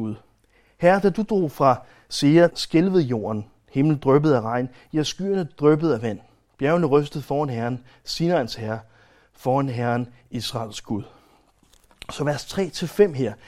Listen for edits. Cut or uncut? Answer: cut